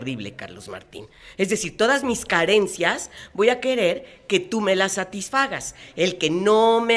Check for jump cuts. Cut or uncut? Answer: uncut